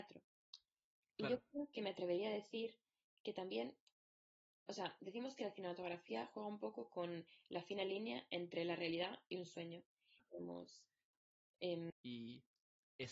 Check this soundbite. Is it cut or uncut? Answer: cut